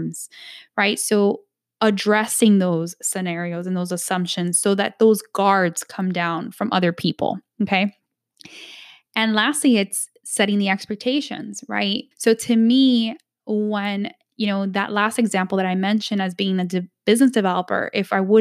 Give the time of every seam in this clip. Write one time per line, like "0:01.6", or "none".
0:12.1